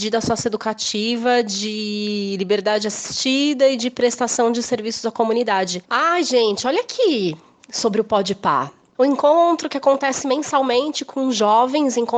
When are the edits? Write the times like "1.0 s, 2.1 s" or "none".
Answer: 5.8 s